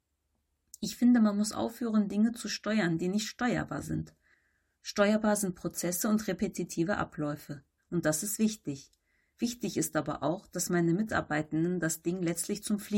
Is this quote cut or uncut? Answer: cut